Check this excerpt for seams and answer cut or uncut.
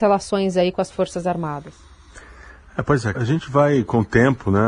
cut